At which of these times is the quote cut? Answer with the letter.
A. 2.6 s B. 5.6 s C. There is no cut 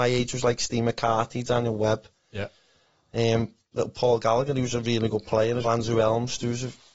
B